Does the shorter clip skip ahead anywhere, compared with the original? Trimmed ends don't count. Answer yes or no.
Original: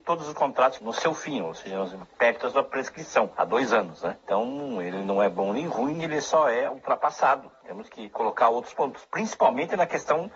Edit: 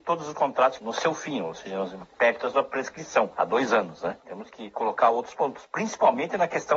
yes